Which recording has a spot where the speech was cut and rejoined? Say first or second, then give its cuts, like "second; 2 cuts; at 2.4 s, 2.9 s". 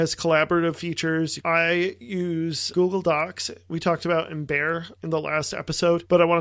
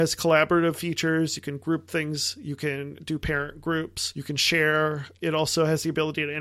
first; 1 cut; at 1.4 s